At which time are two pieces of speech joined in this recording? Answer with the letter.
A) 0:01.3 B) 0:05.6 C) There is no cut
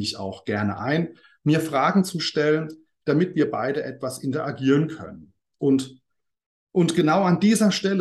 B